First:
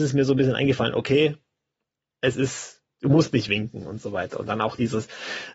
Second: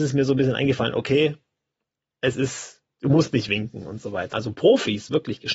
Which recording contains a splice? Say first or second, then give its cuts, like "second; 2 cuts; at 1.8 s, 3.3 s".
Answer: second; 1 cut; at 4.3 s